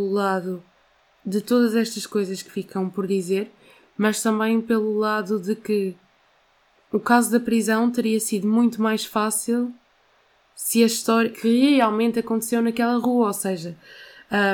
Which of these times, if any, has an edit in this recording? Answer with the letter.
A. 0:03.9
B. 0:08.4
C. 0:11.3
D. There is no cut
C